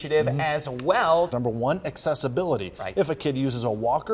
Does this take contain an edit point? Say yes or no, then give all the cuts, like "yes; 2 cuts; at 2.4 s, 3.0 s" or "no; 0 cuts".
yes; 1 cut; at 1.3 s